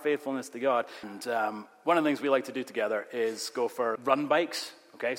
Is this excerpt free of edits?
no; 2 cuts; at 1.0 s, 4.0 s

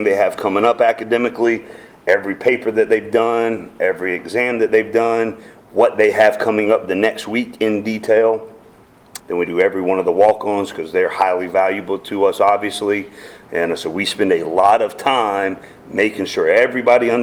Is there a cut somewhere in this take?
yes; 2 cuts; at 9.2 s, 13.4 s

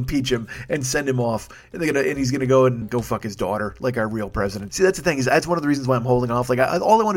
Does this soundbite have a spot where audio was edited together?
yes; 2 cuts; at 2.8 s, 4.7 s

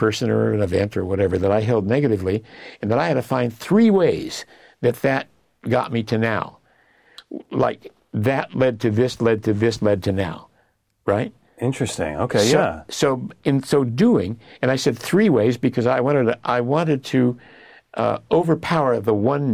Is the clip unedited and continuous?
yes; 0 cuts

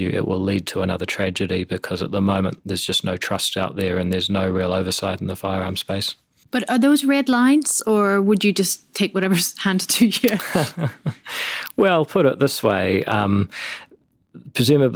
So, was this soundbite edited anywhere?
no; 0 cuts

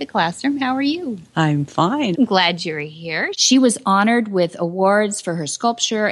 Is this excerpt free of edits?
no; 2 cuts; at 2.1 s, 3.3 s

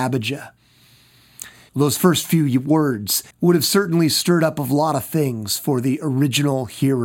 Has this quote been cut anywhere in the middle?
yes; 2 cuts; at 1.7 s, 3.3 s

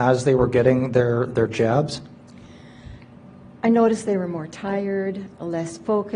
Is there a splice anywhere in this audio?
no; 0 cuts

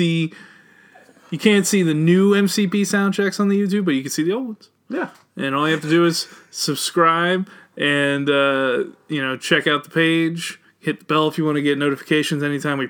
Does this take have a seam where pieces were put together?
no; 0 cuts

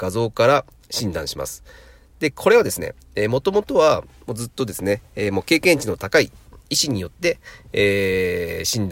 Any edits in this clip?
no; 0 cuts

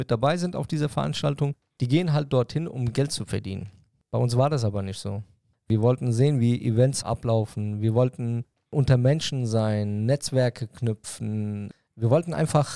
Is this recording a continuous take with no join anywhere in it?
yes; 0 cuts

